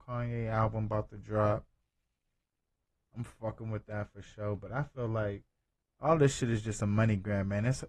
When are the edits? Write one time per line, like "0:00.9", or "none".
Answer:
none